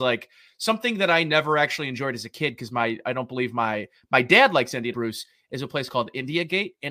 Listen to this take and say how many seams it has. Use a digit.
1